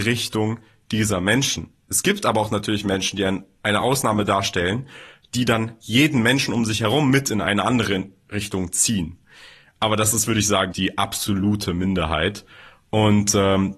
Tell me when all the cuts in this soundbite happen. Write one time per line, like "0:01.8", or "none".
0:10.7